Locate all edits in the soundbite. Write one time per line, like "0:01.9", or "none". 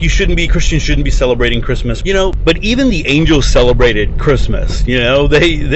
0:02.0